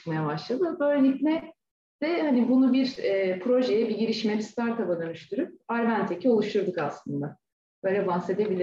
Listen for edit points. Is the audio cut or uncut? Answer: uncut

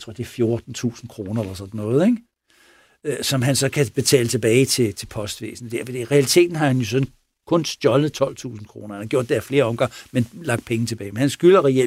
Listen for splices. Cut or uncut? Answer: uncut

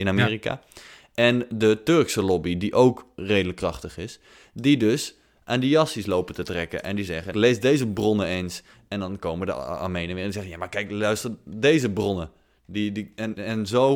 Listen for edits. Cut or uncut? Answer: cut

